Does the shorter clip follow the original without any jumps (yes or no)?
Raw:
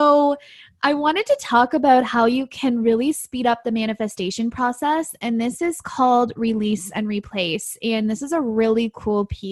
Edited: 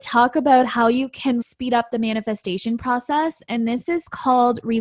no